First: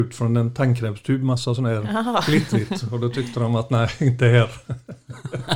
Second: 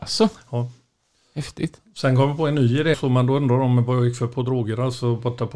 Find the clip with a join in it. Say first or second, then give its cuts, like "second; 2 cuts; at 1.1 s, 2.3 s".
second; 1 cut; at 2.9 s